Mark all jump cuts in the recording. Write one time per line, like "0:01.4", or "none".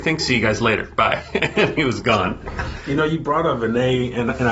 none